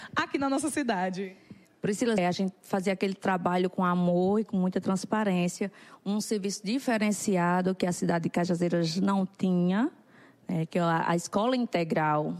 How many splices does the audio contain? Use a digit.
1